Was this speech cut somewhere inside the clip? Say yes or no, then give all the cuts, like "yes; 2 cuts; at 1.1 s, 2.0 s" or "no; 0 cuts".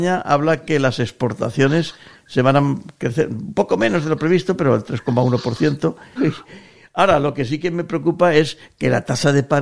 yes; 1 cut; at 6.2 s